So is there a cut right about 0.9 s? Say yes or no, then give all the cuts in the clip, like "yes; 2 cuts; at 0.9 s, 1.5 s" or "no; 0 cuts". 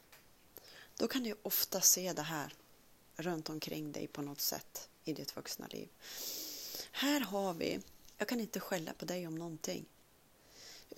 no; 1 cut; at 8.1 s